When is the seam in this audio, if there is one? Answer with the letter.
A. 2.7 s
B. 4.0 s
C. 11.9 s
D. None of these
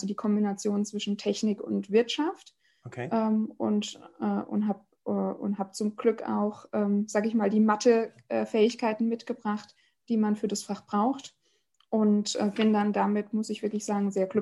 D